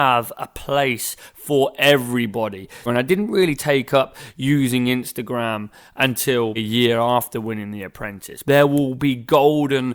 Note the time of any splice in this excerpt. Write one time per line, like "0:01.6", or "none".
0:02.9
0:06.6
0:08.4